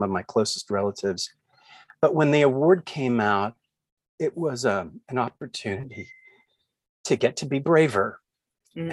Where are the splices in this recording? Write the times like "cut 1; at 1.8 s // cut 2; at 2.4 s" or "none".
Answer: none